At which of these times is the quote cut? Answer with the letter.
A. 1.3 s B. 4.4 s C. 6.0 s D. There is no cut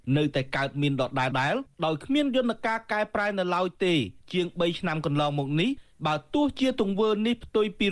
A